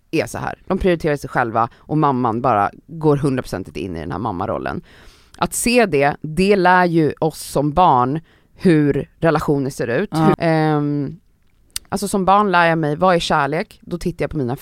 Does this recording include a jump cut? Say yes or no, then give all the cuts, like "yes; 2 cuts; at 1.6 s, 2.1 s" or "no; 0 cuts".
yes; 2 cuts; at 10.3 s, 11.9 s